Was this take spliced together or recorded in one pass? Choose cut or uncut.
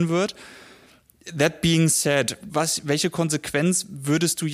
cut